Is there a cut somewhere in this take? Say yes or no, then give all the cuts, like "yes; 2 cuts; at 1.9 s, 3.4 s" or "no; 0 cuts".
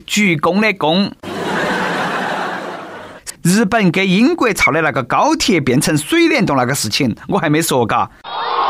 yes; 1 cut; at 3.3 s